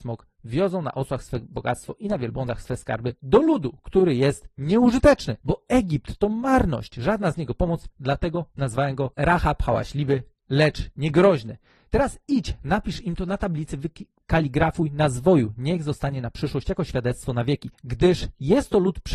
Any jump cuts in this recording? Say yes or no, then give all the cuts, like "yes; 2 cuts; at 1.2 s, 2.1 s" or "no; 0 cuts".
no; 0 cuts